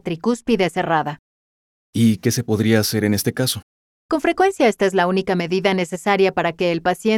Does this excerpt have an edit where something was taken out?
yes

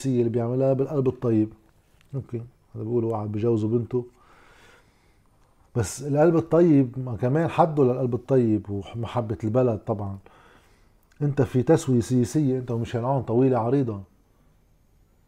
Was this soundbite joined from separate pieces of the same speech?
no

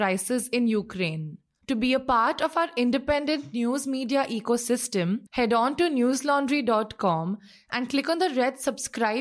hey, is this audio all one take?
no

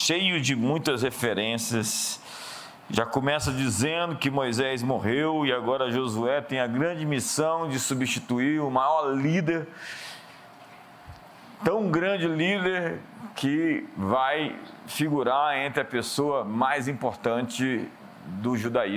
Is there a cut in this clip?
no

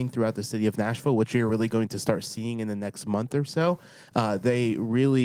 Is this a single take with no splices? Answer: yes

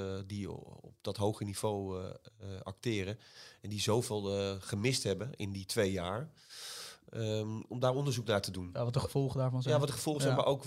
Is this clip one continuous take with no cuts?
yes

